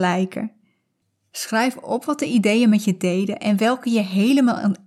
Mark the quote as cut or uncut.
uncut